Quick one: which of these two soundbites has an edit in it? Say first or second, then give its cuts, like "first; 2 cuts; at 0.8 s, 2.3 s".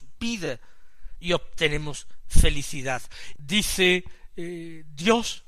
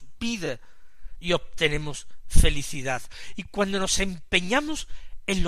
first; 1 cut; at 3.4 s